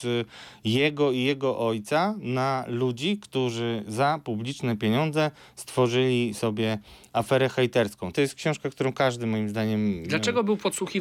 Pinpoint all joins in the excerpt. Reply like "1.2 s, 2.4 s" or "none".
8.1 s